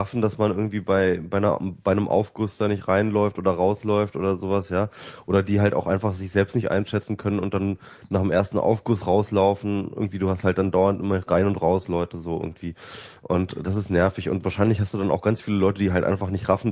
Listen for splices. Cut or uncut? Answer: uncut